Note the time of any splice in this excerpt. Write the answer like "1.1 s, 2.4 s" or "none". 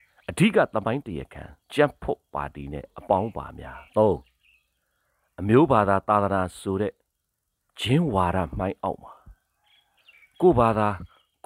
1.6 s, 3.9 s